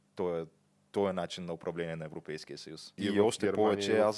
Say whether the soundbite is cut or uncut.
cut